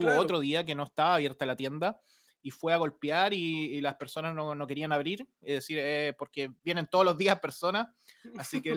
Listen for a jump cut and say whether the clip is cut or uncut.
uncut